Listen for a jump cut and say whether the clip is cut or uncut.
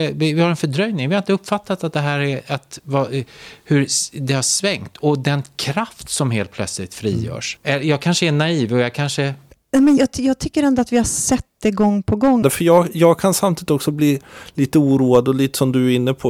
cut